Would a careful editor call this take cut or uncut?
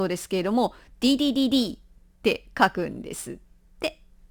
uncut